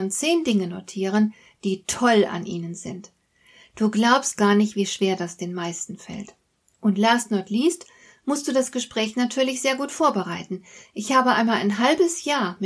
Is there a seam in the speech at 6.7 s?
yes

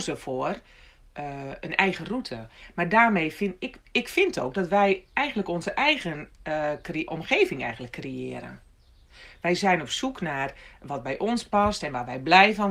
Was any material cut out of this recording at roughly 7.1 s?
yes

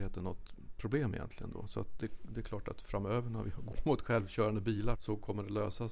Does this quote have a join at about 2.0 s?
yes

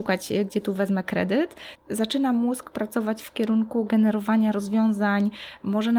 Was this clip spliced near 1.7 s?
yes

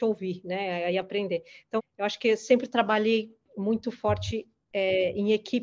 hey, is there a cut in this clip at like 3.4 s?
no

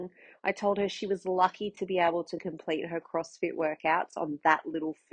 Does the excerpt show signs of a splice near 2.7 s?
no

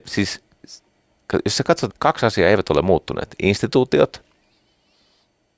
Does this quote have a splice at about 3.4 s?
no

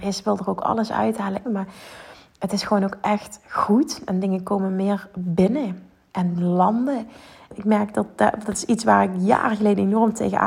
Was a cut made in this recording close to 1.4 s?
yes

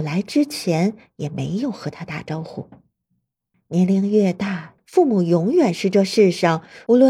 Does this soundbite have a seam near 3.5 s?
yes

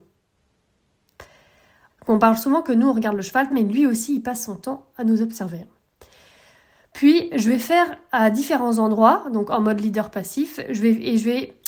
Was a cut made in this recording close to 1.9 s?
yes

